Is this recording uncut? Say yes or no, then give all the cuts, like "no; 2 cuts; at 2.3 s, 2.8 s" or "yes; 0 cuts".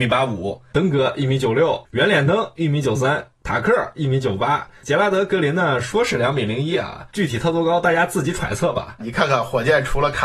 no; 2 cuts; at 7.1 s, 9.0 s